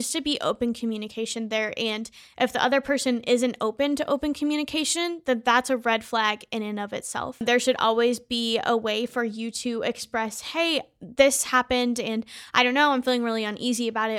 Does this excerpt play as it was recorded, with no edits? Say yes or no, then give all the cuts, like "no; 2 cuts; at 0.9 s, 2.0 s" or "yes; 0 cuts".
no; 1 cut; at 7.4 s